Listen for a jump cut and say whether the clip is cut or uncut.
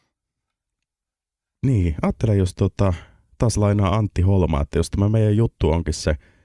uncut